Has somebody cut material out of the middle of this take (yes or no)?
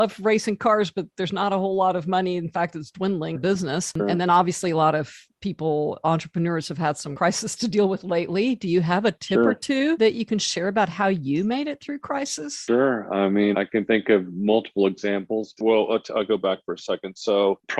yes